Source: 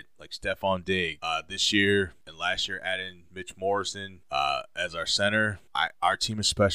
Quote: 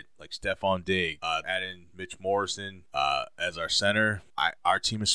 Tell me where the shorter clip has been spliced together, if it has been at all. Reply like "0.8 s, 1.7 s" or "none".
1.4 s